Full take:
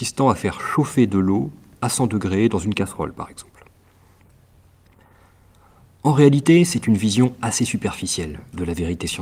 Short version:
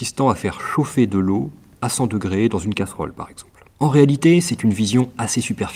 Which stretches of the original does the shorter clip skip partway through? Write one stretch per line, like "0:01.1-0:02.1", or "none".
0:03.7-0:06.0